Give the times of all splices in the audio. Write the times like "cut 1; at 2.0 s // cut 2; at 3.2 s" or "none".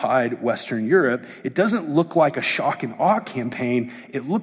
none